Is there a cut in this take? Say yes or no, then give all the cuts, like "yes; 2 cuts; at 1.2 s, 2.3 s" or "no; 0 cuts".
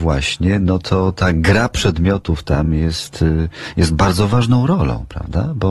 no; 0 cuts